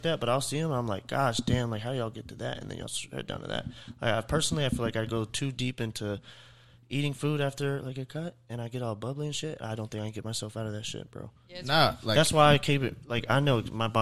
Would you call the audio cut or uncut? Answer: uncut